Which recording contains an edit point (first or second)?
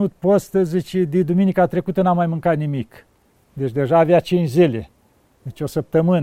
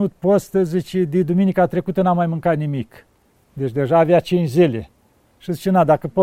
first